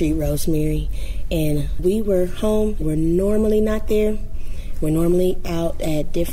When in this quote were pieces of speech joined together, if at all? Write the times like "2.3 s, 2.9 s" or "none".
2.8 s